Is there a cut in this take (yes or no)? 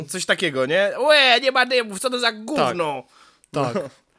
no